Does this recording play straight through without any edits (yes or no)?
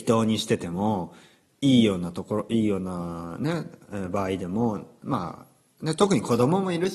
yes